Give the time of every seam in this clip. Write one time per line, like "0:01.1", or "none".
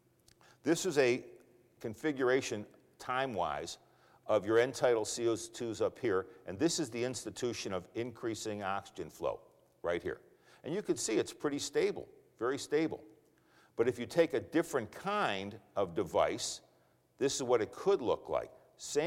none